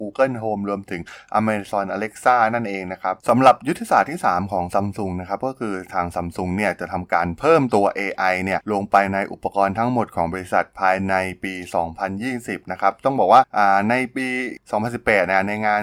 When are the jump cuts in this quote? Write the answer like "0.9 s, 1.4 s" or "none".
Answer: 3.2 s